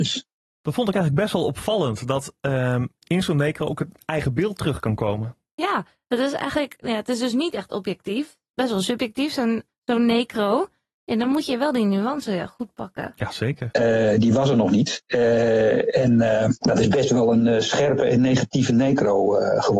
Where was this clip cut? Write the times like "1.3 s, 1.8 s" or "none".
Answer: 9.7 s, 13.7 s